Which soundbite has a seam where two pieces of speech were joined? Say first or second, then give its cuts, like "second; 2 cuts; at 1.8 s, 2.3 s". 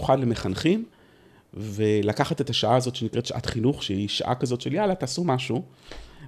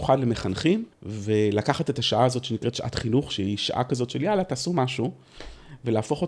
second; 1 cut; at 0.9 s